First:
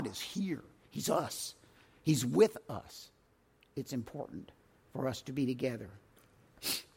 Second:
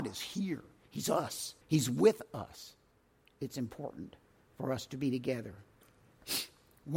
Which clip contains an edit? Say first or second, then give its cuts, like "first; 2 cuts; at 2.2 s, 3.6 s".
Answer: second; 1 cut; at 1.6 s